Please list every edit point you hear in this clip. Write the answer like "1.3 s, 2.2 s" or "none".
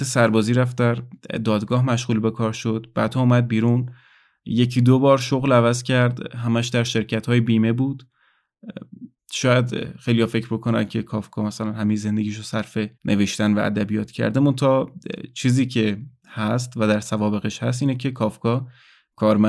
12.9 s